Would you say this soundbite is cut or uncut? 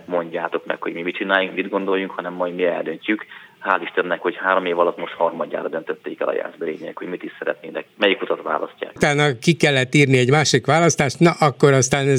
cut